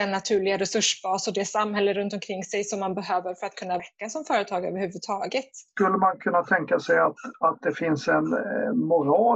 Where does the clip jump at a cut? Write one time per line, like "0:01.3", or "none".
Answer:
0:03.8